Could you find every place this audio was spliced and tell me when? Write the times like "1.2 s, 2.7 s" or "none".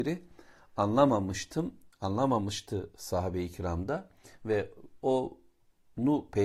none